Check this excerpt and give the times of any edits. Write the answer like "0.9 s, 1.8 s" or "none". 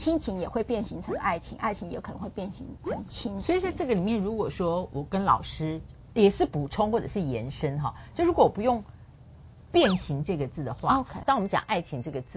11.2 s

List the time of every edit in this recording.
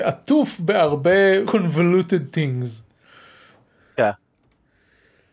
1.4 s

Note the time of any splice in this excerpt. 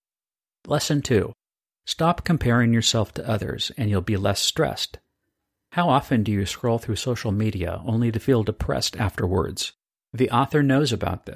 10.0 s

